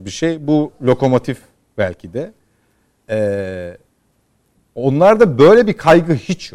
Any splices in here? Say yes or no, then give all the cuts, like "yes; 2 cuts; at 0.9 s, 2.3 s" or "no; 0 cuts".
no; 0 cuts